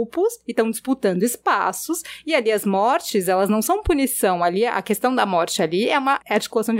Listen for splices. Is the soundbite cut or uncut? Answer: uncut